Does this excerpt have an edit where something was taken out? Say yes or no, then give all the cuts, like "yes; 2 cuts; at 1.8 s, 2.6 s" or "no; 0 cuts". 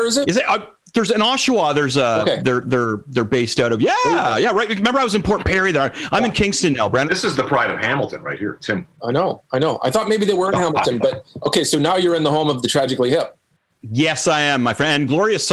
yes; 1 cut; at 7.0 s